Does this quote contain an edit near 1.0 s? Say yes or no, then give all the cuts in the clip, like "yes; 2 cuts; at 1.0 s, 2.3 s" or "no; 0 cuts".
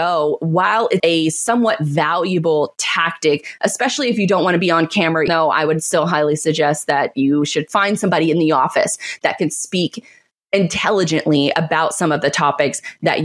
yes; 2 cuts; at 1.0 s, 5.3 s